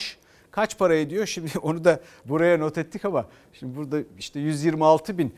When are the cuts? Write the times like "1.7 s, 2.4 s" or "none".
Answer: 2.2 s